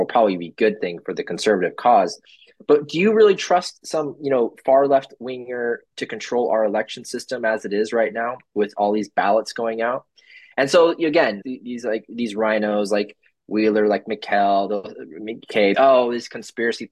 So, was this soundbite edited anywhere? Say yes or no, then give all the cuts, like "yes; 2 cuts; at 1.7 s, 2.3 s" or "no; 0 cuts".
yes; 2 cuts; at 11.4 s, 15.7 s